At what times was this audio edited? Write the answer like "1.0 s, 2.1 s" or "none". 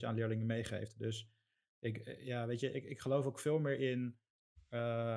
none